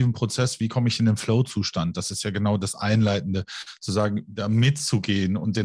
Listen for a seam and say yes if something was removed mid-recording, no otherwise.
no